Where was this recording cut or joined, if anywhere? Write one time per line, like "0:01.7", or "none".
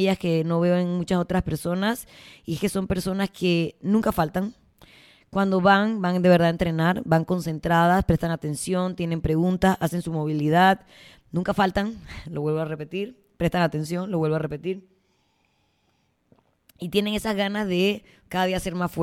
none

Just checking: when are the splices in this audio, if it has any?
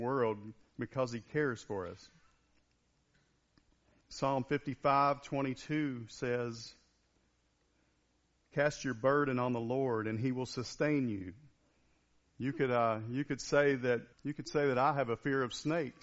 0:04.0
0:12.2
0:14.1

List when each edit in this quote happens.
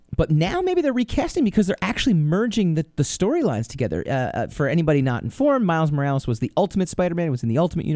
none

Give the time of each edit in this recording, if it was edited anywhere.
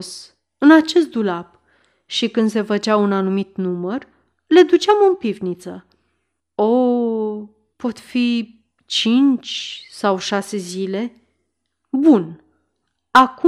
0:06.4
0:07.7

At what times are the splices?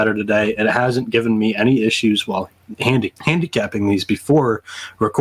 0:03.2

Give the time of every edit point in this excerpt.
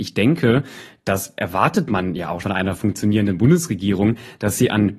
0:02.4

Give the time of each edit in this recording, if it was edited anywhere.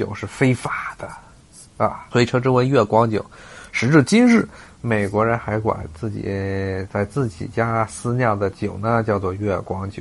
0:02.1

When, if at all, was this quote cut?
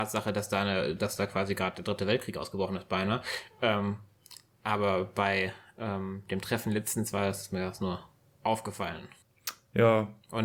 none

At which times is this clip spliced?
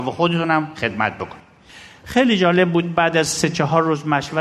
none

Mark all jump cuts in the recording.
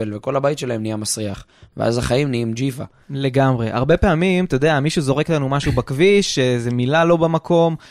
none

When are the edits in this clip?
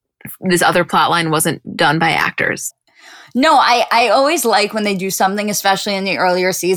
0:02.7

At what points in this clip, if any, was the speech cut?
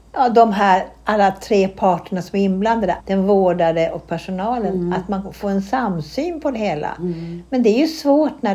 0:03.0

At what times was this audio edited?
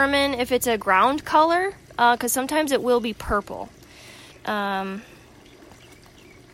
0:04.3

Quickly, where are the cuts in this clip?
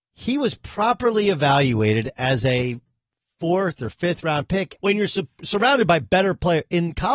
0:04.8

